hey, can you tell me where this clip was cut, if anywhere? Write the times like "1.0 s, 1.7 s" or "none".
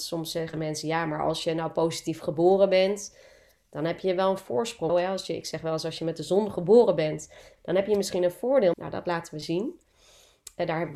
4.9 s, 8.7 s